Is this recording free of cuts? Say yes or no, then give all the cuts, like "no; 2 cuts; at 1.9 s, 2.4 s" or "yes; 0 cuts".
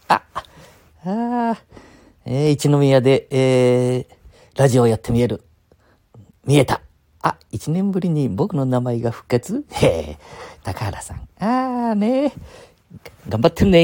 yes; 0 cuts